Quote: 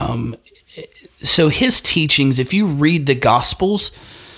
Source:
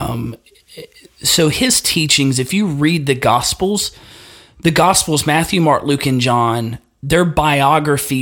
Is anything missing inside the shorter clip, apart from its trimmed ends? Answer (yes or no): no